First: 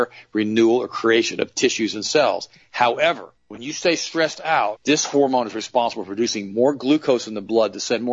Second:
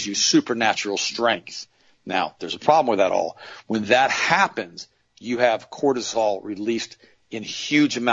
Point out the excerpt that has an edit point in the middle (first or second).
first